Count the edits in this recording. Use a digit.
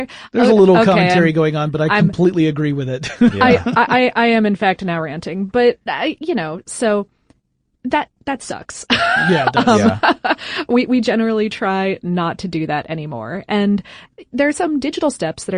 0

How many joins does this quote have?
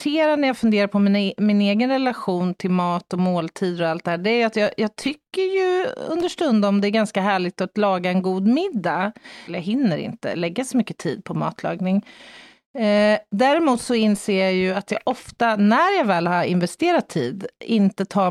1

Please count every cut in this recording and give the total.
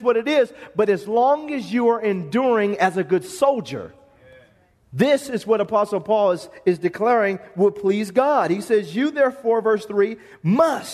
0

